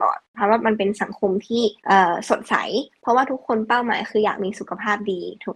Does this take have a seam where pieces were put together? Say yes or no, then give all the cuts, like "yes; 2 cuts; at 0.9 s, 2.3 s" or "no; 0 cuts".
yes; 1 cut; at 1.8 s